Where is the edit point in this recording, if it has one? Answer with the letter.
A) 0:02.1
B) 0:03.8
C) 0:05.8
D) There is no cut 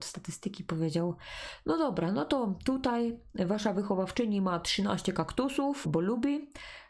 C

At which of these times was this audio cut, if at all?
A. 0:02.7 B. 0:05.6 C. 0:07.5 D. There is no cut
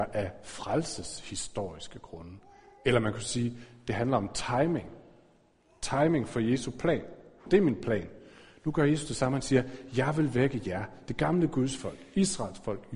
C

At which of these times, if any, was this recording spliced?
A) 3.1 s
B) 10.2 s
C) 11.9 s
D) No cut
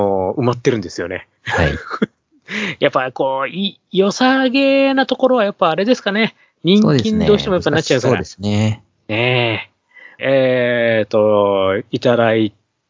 B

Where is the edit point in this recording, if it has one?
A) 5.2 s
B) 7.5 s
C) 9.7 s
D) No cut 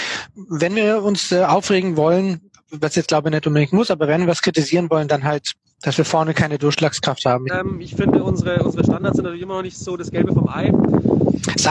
B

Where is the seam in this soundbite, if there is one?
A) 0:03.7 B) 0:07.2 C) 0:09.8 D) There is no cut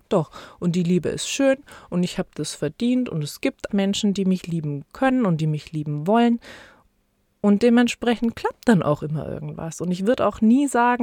A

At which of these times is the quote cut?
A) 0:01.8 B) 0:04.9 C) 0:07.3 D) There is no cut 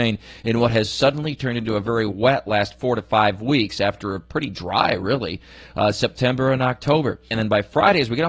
C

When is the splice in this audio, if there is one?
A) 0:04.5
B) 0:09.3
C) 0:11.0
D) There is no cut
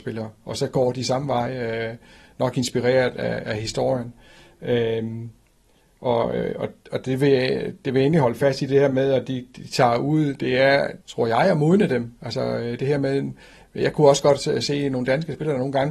C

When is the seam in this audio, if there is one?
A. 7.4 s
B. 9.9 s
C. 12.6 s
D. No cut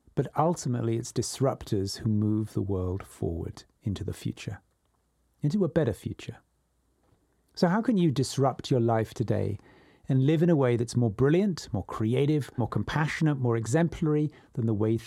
C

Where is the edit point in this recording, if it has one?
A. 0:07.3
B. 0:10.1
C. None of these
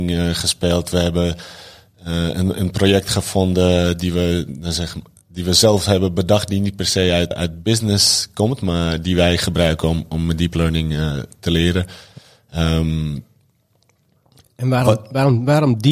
A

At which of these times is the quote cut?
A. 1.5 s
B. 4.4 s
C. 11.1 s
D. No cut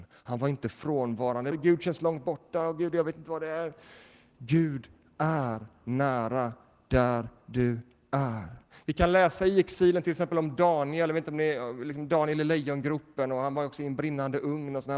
A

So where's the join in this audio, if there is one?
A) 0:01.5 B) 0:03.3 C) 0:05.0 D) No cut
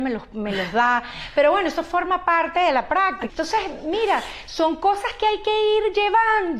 B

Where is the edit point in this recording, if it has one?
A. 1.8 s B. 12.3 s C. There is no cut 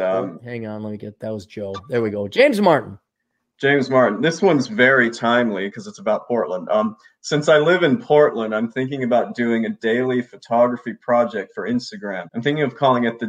B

